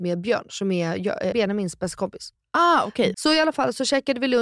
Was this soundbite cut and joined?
yes; 2 cuts; at 1.3 s, 3.1 s

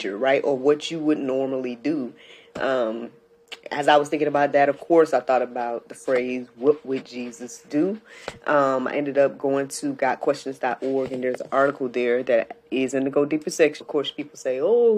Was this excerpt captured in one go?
no; 1 cut; at 13.8 s

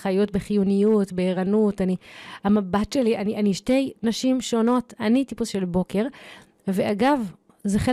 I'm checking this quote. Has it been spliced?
no; 0 cuts

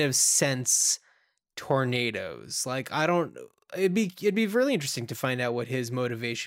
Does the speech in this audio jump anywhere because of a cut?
no; 0 cuts

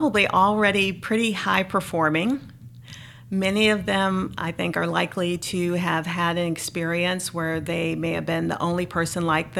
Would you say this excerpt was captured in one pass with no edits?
yes; 0 cuts

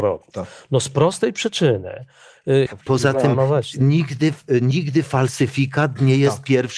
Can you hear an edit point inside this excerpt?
yes; 1 cut; at 2.7 s

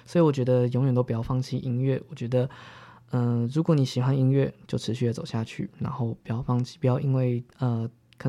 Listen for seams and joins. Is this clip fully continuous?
yes; 0 cuts

